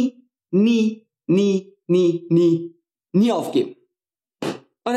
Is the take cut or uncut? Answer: uncut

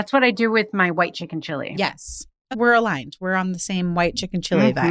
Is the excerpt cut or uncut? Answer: cut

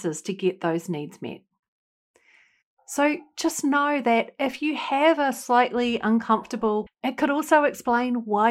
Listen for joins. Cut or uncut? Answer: cut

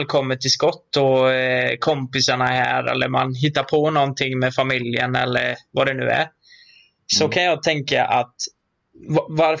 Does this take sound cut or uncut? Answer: uncut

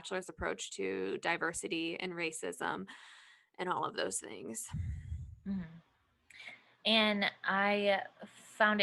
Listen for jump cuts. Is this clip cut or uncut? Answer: uncut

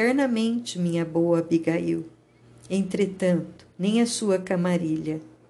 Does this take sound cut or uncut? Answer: cut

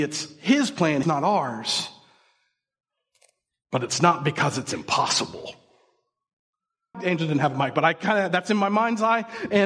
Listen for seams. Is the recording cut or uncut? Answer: cut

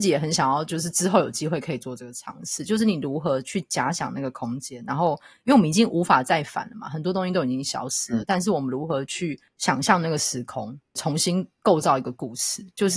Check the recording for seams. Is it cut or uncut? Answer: uncut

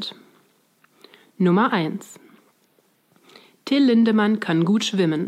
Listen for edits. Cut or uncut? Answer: uncut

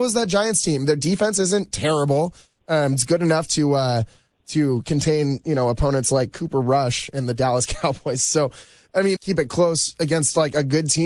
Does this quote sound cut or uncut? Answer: cut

